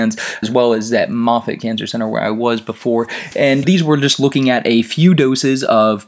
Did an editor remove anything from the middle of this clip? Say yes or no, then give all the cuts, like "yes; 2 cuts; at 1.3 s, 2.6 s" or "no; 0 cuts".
no; 0 cuts